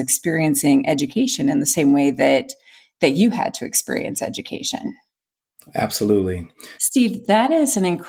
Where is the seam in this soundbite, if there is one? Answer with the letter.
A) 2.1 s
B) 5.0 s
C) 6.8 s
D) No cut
C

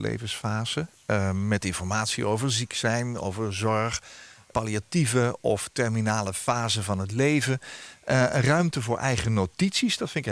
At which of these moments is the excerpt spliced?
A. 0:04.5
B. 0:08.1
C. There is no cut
A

